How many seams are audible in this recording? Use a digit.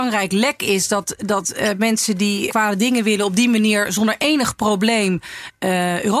1